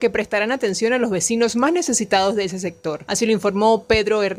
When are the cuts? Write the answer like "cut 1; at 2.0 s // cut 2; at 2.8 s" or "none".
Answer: none